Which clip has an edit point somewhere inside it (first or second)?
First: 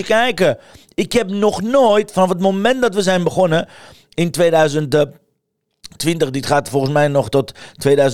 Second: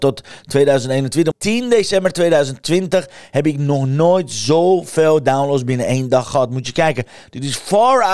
second